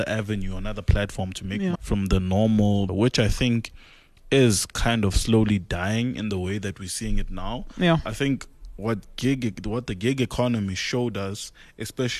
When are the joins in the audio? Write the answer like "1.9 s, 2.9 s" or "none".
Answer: 1.7 s, 2.9 s